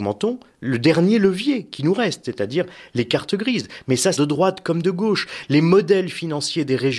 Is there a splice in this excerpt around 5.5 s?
no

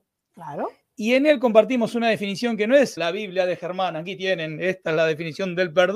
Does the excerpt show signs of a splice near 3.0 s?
yes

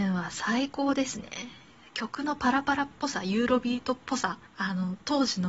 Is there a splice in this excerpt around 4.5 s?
yes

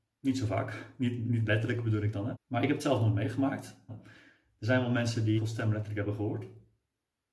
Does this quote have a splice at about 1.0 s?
no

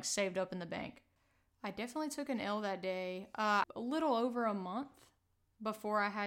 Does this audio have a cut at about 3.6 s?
yes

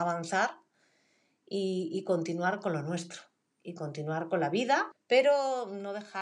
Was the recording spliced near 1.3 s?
no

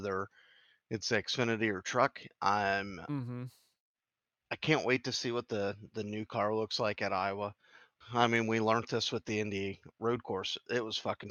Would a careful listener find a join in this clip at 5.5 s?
no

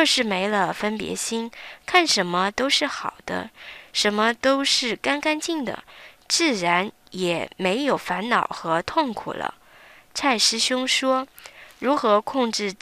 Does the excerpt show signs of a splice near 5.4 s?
yes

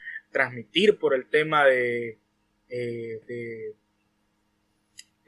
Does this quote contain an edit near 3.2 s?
yes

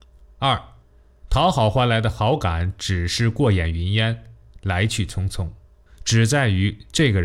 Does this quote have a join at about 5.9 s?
yes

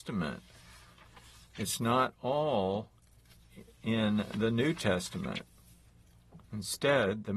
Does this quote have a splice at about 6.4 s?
yes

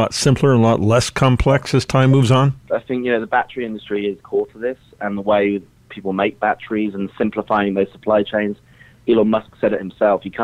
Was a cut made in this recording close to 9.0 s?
no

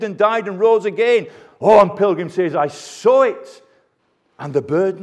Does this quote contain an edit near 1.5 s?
no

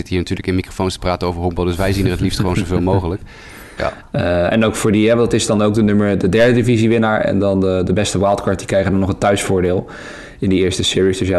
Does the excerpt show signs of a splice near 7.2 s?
no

